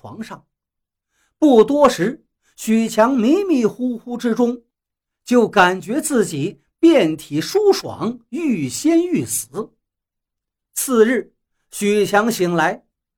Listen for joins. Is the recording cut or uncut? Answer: uncut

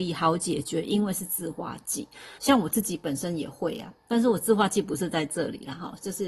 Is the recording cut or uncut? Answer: cut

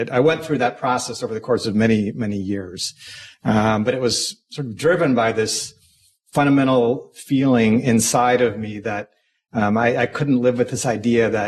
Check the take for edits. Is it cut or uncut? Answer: uncut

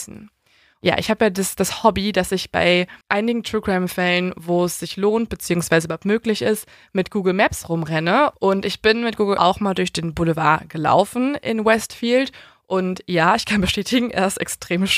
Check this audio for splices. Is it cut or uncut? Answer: cut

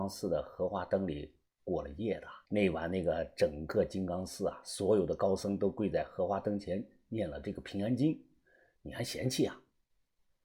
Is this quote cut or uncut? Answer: cut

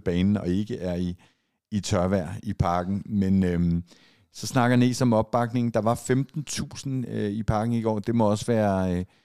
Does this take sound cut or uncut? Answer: uncut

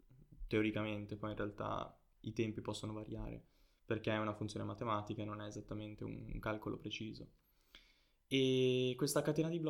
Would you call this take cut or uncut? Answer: uncut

